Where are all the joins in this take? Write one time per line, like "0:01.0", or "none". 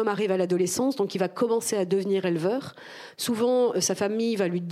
none